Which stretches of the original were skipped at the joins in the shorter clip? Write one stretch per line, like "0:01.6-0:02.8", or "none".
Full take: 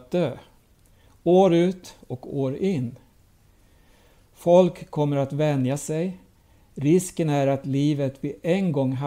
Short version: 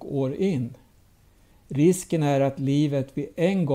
0:03.7-0:06.6